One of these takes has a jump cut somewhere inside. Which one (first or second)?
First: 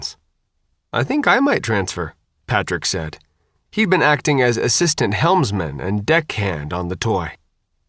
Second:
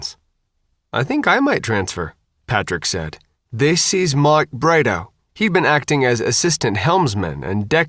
second